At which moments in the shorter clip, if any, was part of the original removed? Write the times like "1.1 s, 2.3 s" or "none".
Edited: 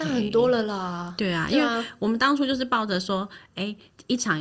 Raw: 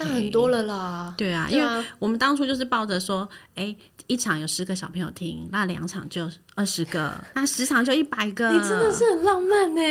none